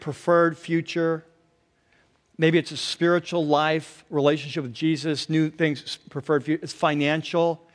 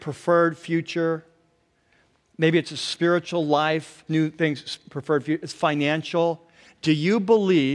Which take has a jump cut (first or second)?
second